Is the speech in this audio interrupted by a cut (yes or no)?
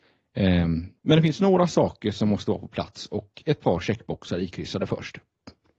yes